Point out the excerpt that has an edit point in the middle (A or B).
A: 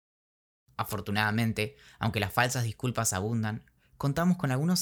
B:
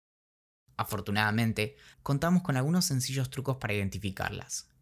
B